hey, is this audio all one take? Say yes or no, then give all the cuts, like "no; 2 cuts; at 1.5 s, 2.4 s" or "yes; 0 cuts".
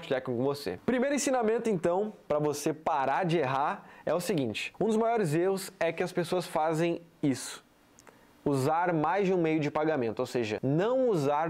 no; 1 cut; at 2.3 s